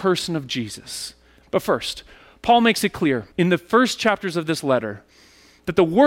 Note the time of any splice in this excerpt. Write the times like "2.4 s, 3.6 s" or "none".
1.4 s, 3.3 s